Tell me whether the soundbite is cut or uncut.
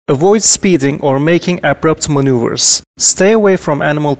uncut